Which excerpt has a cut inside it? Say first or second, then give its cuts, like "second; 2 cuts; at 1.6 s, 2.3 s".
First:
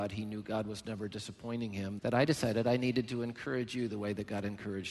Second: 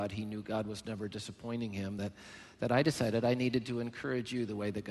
first; 1 cut; at 2.0 s